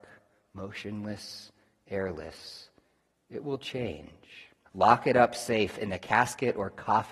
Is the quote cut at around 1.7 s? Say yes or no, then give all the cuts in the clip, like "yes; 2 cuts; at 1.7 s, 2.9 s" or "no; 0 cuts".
no; 1 cut; at 4.7 s